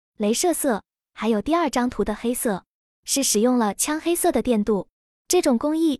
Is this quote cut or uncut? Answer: uncut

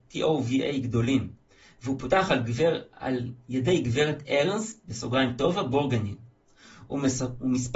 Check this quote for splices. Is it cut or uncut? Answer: uncut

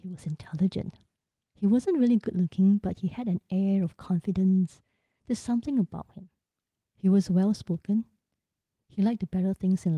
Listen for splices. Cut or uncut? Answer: uncut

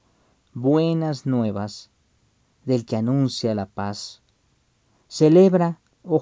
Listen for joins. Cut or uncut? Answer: uncut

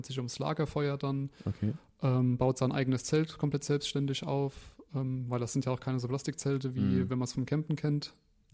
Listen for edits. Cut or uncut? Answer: uncut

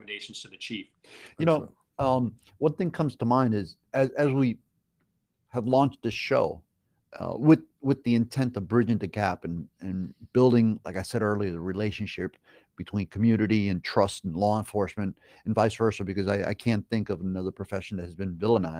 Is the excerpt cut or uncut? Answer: cut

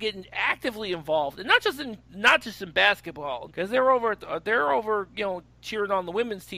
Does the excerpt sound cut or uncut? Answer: cut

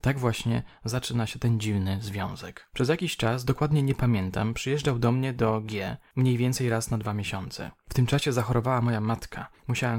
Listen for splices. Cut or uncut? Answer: uncut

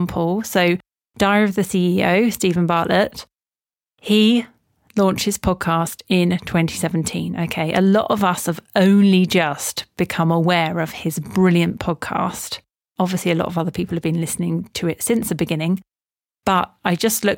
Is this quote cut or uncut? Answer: uncut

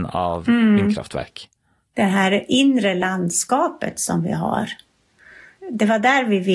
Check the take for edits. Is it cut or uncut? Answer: cut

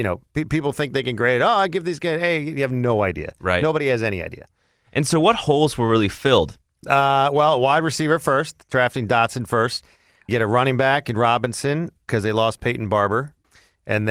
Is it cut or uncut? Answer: uncut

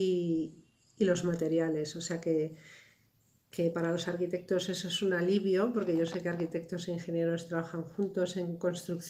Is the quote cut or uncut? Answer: uncut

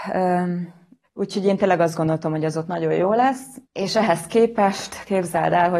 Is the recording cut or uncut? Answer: cut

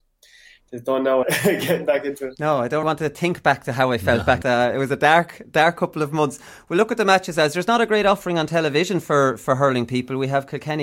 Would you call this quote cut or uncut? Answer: cut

